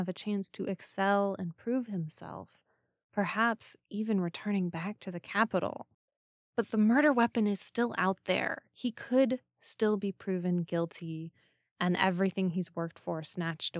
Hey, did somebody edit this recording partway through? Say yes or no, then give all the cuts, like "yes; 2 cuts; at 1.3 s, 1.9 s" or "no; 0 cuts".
no; 0 cuts